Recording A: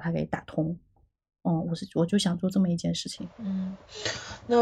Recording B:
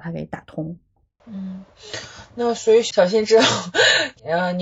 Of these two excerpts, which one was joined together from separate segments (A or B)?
B